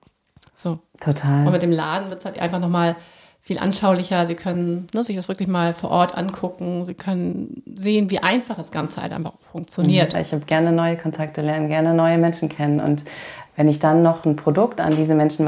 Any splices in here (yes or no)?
yes